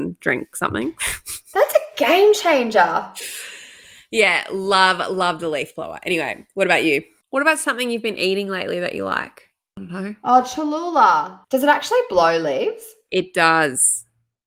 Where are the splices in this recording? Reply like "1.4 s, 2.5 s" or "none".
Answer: 11.4 s